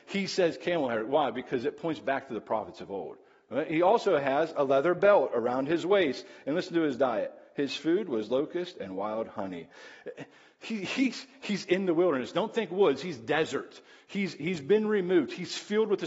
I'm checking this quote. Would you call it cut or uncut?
uncut